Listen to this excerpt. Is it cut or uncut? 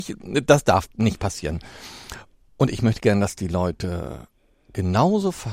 uncut